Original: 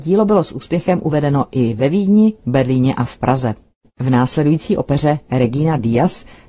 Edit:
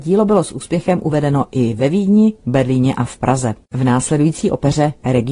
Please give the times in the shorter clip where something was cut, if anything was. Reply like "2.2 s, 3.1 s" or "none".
3.6 s